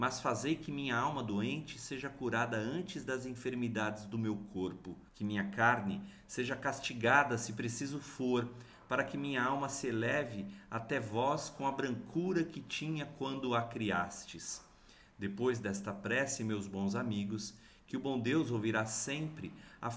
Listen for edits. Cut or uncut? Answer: cut